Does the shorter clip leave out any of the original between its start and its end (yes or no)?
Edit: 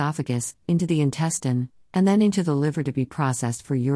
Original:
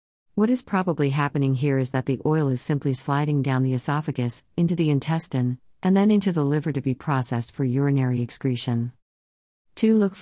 no